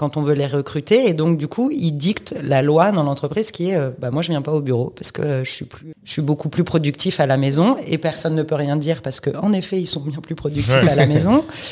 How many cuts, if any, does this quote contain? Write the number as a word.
one